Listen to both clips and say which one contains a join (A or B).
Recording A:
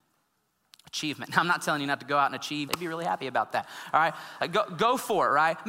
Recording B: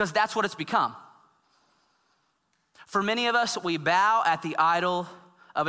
A